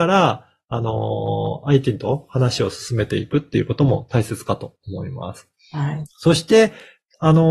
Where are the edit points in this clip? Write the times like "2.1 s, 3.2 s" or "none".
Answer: 6.0 s